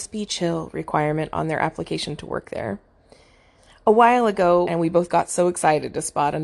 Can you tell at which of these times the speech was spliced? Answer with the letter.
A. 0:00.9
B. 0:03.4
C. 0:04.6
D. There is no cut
C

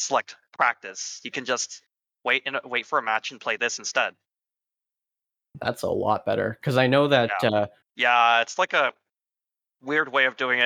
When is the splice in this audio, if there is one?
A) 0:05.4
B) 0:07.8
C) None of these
B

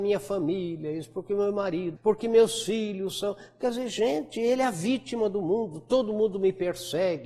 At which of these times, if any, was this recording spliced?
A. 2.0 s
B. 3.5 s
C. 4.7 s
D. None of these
A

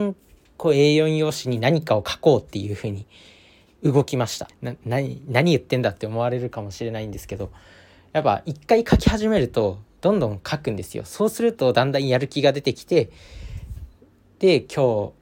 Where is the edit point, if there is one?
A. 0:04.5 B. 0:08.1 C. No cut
A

